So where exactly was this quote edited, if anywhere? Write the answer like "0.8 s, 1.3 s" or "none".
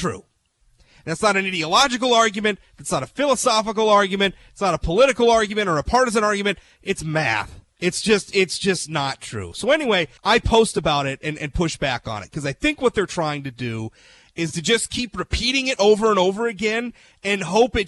10.2 s